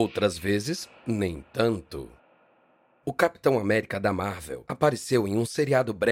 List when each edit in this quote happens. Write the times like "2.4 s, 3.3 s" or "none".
none